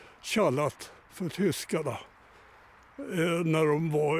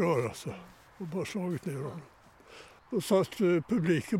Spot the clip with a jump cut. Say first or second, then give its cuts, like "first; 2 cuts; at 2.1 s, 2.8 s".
second; 1 cut; at 2.8 s